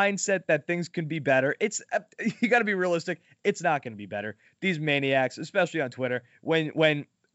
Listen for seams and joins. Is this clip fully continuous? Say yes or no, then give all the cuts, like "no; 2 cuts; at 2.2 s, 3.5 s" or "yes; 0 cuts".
yes; 0 cuts